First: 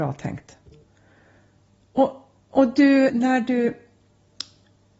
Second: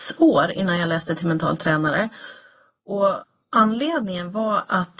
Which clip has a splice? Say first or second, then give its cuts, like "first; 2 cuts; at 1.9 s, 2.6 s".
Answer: first; 1 cut; at 3.1 s